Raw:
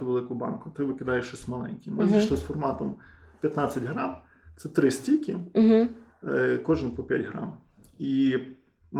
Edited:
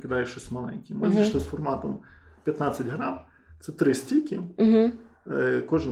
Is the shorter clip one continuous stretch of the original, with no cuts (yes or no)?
yes